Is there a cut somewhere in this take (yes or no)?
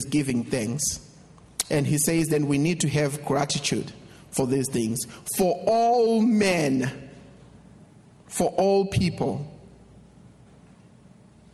no